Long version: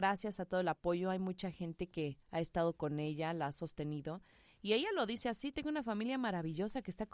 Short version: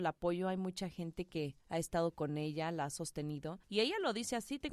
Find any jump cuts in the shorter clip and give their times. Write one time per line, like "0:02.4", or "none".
0:03.6